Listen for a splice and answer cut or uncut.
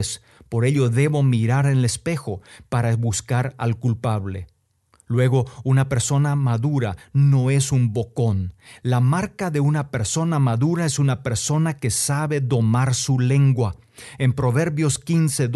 uncut